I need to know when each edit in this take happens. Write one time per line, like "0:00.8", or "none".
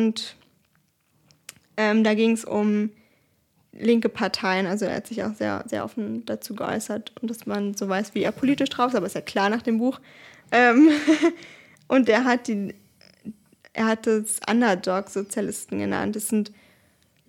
none